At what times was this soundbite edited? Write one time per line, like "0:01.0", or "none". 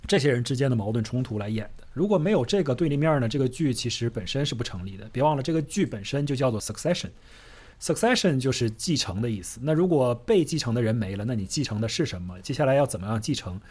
none